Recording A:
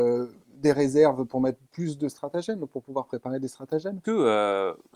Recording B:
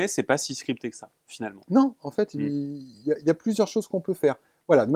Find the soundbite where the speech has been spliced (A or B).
A